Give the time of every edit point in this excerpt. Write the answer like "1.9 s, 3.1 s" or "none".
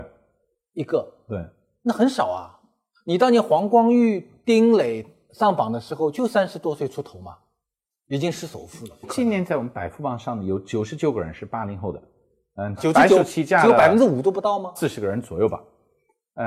9.0 s, 12.8 s, 14.8 s